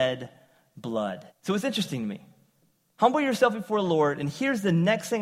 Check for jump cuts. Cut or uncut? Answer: cut